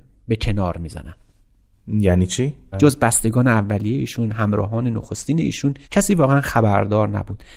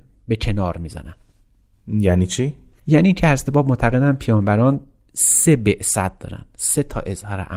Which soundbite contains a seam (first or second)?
first